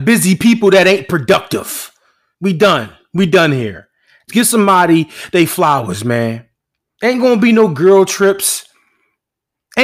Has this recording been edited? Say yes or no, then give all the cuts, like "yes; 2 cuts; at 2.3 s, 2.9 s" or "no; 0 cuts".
yes; 3 cuts; at 2.3 s, 4.3 s, 6.9 s